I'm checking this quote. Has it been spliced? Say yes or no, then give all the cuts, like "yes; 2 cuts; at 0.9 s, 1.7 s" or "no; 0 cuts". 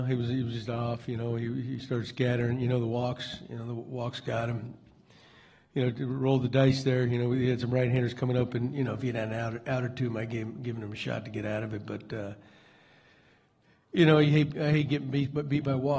no; 0 cuts